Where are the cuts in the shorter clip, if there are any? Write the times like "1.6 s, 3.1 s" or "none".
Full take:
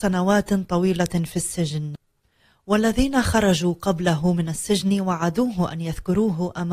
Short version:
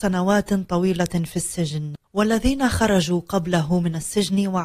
2.0 s